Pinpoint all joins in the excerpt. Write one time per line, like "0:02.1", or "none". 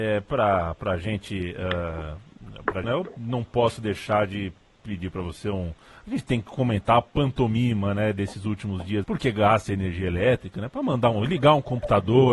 0:02.8
0:09.0